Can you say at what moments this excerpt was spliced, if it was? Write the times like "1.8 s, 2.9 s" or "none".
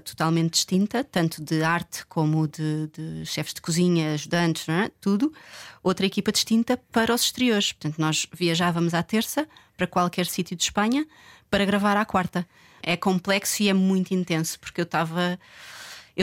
12.8 s